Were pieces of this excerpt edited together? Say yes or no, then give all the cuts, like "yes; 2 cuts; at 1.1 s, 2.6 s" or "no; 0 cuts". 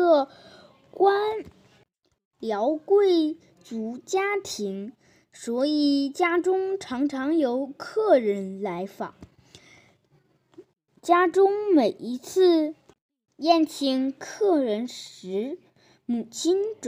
no; 0 cuts